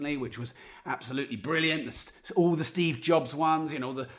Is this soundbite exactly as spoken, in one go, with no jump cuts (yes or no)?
yes